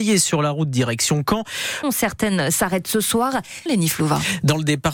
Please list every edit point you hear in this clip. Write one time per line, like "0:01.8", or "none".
0:01.8
0:03.7